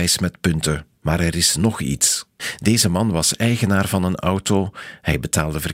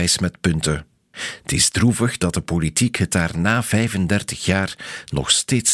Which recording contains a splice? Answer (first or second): first